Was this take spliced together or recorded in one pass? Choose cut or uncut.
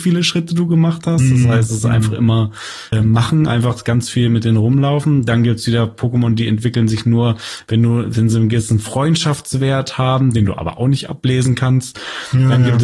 cut